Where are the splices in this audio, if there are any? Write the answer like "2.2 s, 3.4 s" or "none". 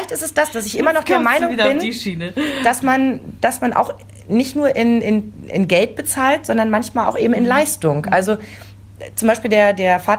none